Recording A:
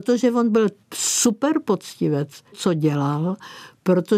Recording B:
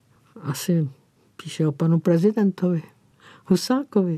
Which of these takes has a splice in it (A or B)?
A